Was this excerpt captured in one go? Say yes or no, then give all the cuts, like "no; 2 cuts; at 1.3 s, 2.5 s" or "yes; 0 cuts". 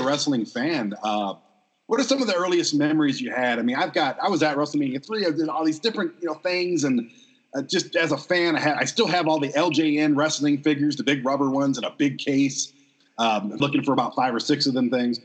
no; 1 cut; at 13.6 s